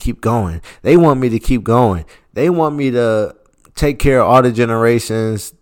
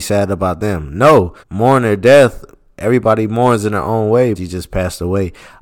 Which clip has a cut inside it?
second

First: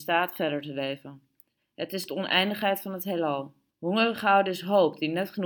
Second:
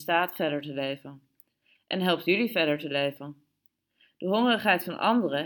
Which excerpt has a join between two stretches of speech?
first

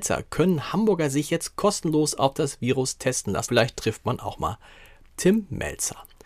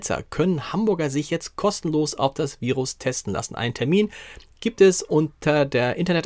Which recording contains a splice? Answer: first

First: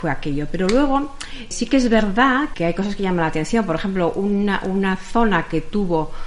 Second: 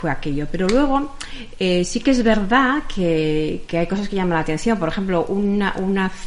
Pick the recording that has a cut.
first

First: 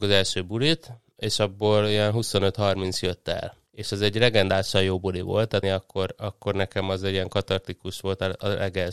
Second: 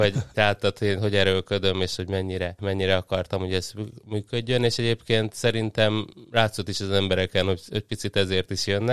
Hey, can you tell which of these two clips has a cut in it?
first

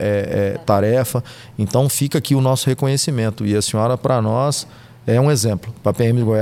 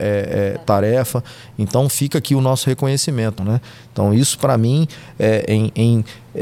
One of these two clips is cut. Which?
second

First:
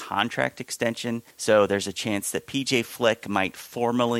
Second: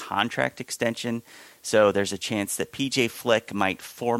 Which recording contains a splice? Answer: first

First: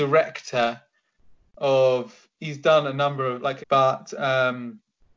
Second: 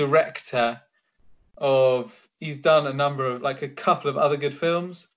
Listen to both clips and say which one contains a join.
first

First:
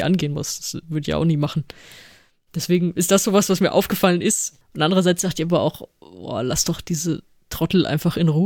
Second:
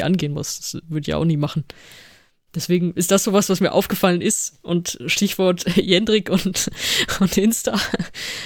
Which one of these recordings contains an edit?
first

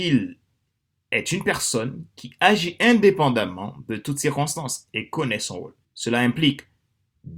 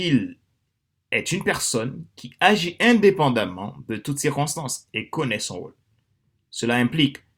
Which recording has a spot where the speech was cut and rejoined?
first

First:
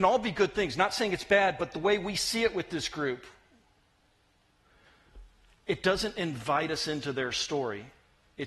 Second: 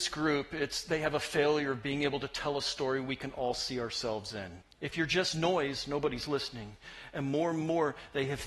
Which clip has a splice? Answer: second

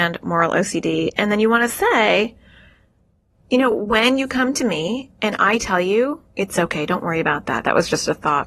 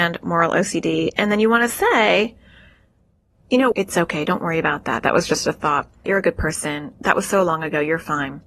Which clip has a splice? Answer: second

